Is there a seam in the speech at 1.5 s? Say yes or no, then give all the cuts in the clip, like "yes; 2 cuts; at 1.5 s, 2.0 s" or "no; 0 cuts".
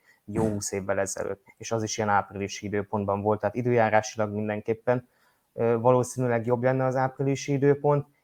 yes; 2 cuts; at 1.5 s, 3.4 s